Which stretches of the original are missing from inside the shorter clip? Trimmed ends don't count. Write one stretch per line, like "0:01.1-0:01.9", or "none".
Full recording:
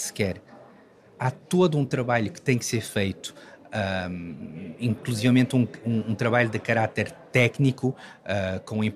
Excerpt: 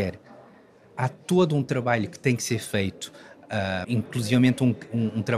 0:04.1-0:04.8